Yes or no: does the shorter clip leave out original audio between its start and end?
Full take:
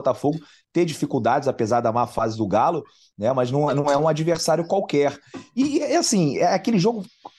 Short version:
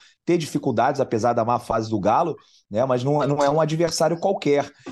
no